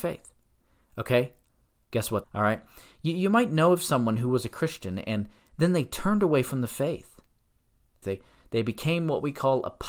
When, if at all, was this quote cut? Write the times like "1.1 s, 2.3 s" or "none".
2.2 s, 8.0 s